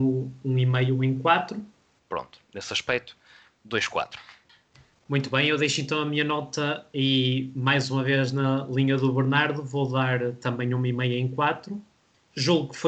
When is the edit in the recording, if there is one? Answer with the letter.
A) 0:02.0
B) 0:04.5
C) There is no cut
A